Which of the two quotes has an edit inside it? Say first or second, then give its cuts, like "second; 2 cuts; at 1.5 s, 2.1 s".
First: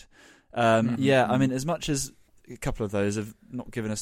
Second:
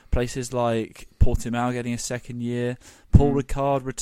first; 1 cut; at 1.0 s